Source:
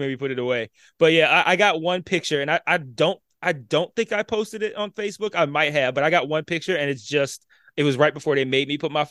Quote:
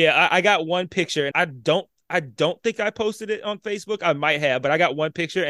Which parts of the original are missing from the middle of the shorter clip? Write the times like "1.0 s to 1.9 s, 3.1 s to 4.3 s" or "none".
2.5 s to 2.6 s